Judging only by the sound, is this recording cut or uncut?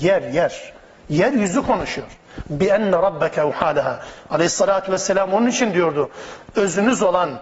uncut